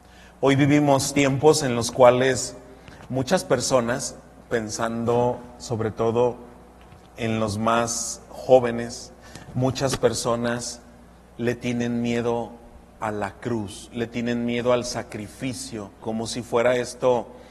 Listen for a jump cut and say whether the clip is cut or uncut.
cut